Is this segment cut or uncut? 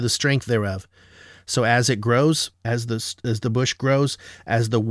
uncut